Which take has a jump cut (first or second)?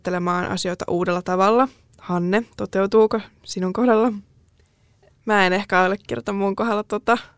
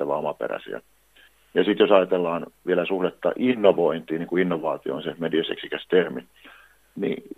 first